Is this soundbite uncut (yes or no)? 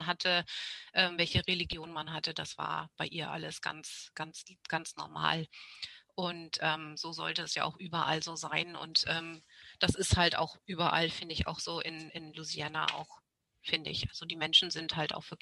yes